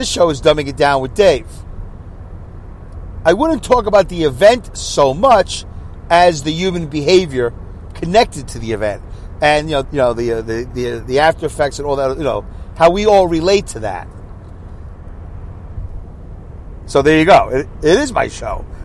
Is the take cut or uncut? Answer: cut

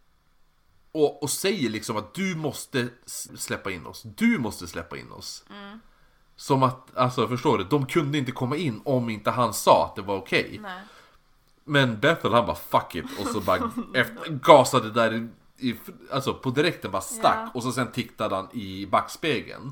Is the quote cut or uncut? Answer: cut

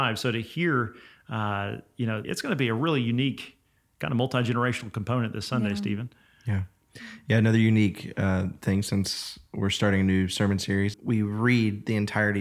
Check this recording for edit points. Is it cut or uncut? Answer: cut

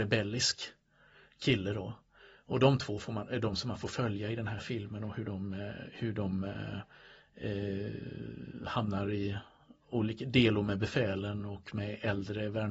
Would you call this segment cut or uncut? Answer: uncut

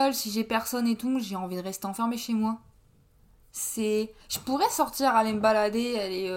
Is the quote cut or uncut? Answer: uncut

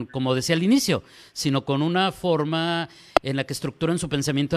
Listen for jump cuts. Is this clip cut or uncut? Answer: uncut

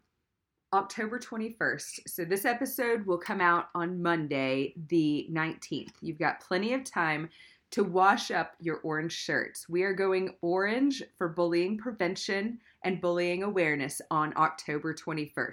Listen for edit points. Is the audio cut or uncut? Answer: uncut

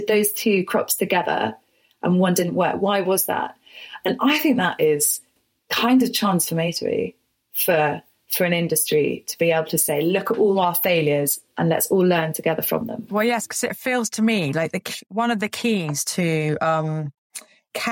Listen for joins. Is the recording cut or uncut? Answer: uncut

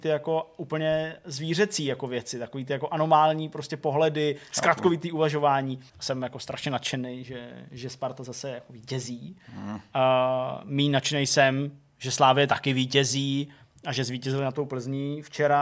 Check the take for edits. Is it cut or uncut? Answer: cut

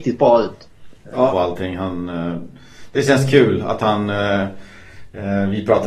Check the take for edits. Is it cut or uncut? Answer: cut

